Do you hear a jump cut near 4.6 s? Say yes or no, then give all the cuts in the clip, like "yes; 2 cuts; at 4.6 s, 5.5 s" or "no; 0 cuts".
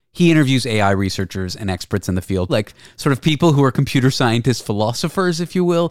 no; 1 cut; at 2.5 s